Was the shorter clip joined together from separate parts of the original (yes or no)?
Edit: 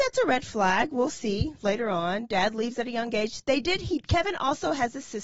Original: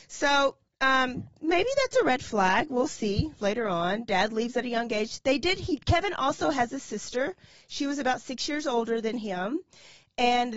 no